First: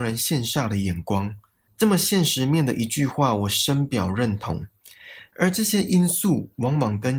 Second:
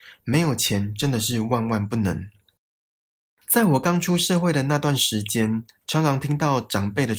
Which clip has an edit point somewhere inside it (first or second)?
first